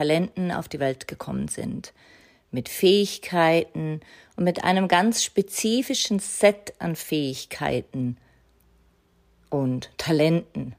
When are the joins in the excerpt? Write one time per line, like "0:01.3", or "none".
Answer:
none